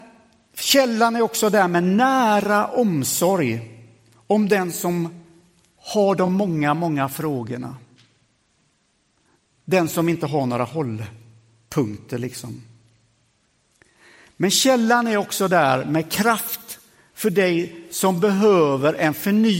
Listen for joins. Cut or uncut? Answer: uncut